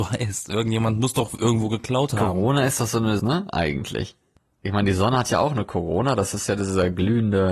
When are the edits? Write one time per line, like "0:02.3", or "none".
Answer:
0:03.2